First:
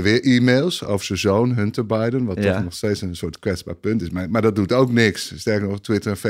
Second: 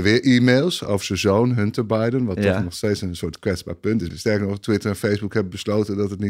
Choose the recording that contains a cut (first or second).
second